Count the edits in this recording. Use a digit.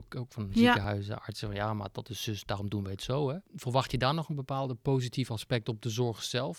0